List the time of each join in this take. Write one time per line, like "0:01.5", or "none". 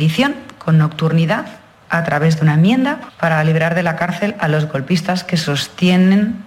none